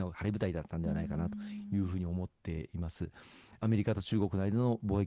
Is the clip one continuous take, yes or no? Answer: yes